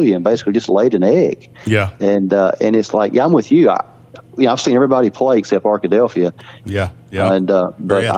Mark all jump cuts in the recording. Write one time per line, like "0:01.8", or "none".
0:06.6